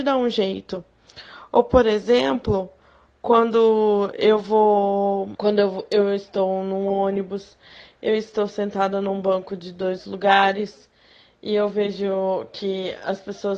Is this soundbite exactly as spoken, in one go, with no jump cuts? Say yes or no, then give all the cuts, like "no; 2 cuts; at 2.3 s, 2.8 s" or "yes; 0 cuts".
yes; 0 cuts